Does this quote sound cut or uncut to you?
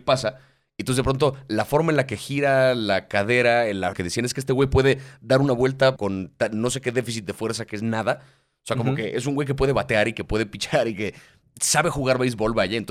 cut